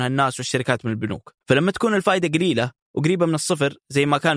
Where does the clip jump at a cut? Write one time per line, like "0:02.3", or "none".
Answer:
0:01.4